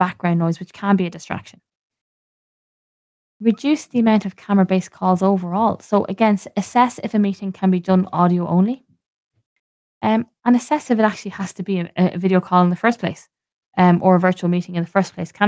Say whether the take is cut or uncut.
uncut